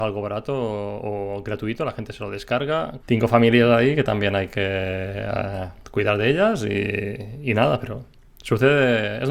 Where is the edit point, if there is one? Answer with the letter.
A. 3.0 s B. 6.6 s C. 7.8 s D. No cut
A